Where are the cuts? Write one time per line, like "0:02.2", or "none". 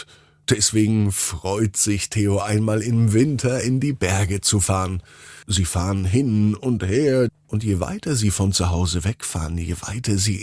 0:05.4
0:07.3